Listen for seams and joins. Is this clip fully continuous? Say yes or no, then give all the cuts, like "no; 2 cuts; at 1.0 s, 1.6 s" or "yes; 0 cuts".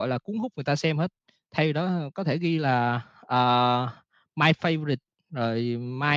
yes; 0 cuts